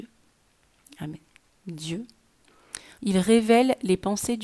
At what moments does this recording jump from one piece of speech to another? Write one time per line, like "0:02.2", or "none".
0:01.6
0:03.0